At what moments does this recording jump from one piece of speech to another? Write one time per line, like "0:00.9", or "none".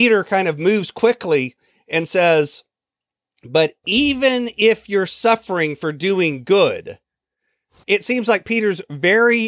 0:07.8